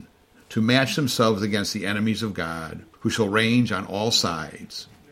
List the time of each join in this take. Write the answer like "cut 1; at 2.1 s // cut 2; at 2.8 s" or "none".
cut 1; at 2.9 s